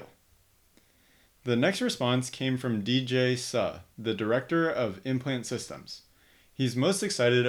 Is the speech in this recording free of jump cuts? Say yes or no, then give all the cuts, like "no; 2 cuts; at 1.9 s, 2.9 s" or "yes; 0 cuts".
yes; 0 cuts